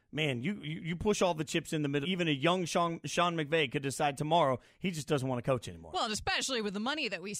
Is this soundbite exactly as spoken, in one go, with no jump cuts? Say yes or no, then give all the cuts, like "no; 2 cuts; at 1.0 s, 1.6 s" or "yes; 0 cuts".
no; 1 cut; at 2.0 s